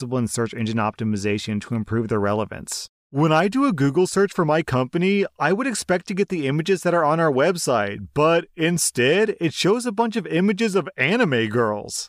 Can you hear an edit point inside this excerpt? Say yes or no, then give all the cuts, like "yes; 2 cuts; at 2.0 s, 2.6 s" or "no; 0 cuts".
yes; 1 cut; at 3.0 s